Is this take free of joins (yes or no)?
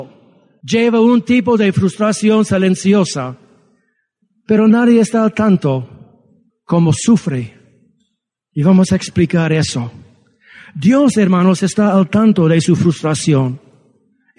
yes